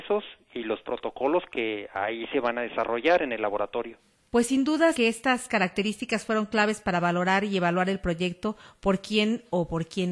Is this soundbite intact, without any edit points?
no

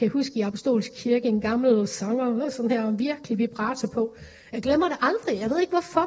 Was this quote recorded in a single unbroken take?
no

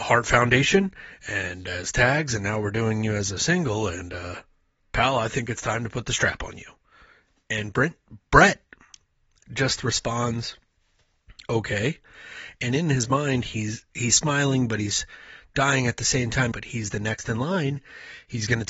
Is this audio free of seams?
no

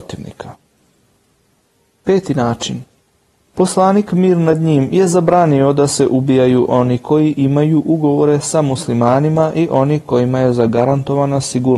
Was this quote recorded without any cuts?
yes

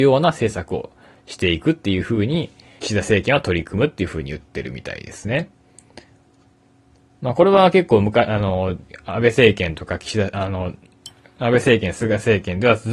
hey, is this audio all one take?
no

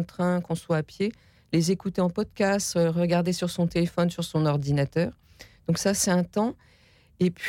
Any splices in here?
no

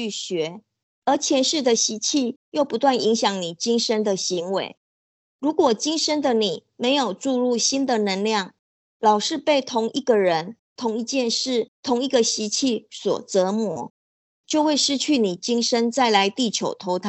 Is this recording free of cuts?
yes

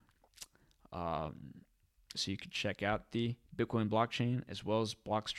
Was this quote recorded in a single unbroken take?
no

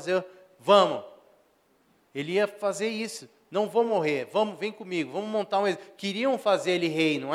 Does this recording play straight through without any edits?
yes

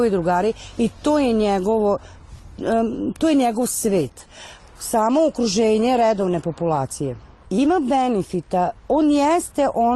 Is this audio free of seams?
no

